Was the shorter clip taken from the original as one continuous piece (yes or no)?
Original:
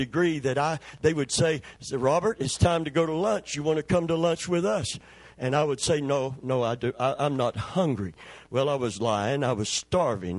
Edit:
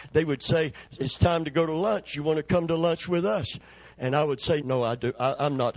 no